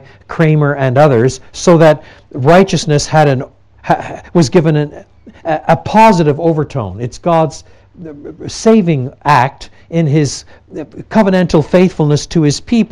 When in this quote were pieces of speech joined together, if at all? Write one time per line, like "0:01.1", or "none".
none